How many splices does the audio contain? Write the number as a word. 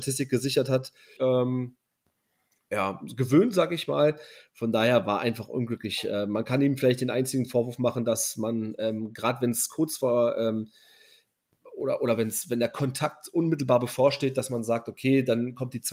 one